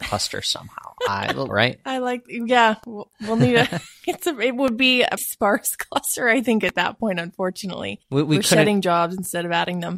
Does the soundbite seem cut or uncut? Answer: cut